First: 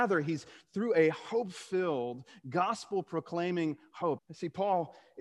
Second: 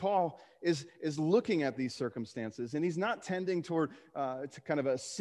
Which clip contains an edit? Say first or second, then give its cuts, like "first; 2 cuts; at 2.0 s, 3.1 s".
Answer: first; 1 cut; at 4.2 s